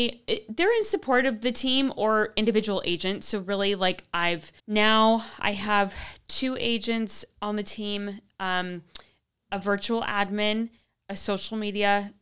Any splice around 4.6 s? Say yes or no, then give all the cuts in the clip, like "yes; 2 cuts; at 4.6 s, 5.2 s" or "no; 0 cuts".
yes; 1 cut; at 4.6 s